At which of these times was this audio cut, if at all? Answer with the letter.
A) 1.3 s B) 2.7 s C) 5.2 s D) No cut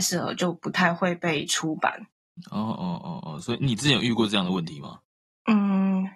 B